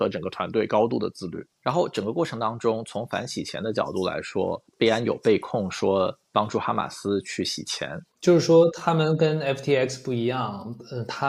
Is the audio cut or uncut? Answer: cut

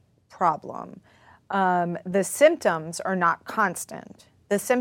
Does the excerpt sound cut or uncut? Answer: uncut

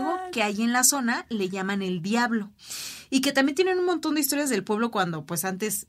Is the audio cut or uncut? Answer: uncut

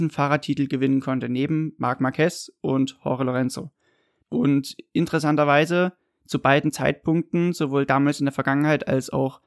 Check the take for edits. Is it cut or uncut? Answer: cut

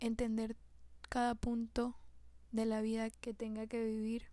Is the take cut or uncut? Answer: cut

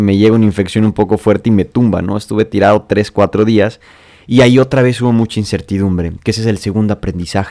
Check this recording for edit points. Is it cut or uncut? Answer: uncut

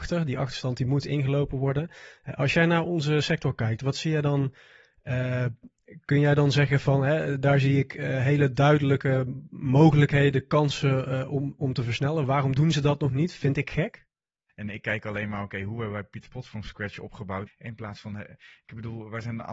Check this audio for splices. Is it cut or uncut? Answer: cut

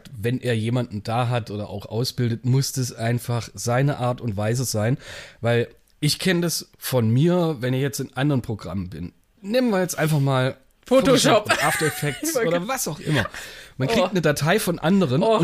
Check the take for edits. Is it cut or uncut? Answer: uncut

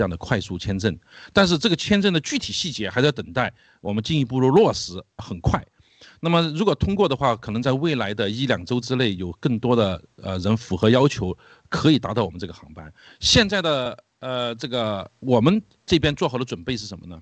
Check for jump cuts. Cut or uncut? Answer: cut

